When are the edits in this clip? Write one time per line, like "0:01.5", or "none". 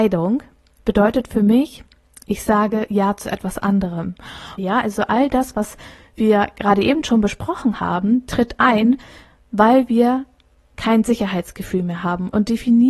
0:04.6